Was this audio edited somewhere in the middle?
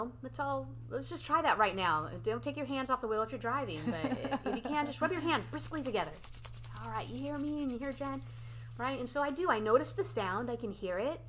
no; 0 cuts

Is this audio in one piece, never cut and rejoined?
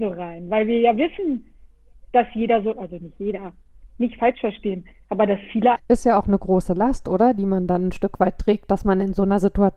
no; 1 cut; at 5.8 s

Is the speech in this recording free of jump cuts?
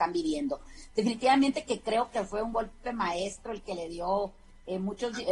yes; 0 cuts

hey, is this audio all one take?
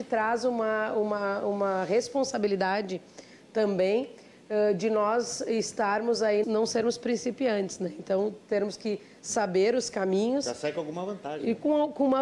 no; 1 cut; at 6.4 s

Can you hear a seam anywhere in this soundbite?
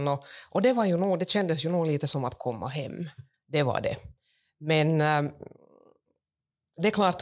yes; 1 cut; at 3.3 s

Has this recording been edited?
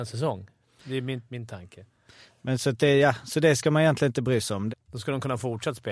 yes; 2 cuts; at 1.3 s, 4.7 s

